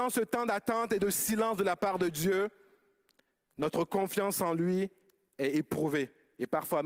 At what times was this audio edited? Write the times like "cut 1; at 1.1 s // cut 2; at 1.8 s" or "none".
none